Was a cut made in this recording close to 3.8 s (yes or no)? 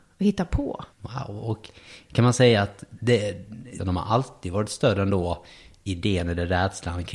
yes